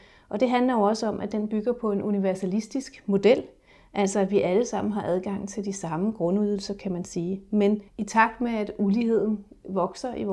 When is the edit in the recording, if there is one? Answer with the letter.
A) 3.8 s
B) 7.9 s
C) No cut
B